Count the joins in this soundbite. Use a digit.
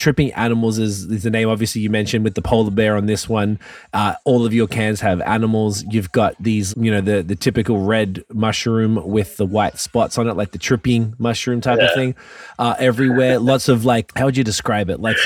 2